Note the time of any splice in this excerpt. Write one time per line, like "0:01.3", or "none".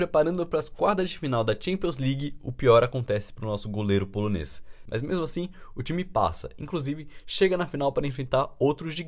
0:04.9